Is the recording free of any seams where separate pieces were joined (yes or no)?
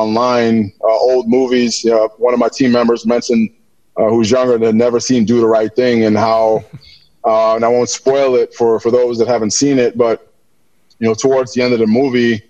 yes